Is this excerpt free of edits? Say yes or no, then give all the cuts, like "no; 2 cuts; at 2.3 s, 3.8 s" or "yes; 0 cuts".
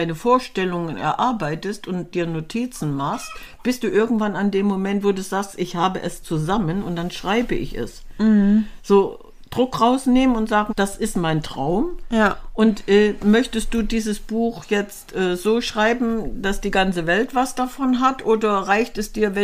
no; 1 cut; at 10.7 s